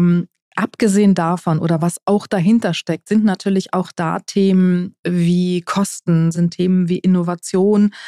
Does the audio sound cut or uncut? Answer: cut